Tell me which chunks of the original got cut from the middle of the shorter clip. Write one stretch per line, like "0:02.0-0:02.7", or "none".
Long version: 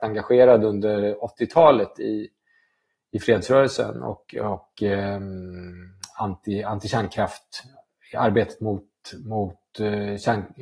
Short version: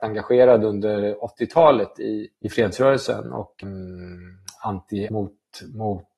0:02.3-0:03.0
0:04.3-0:05.2
0:06.6-0:08.6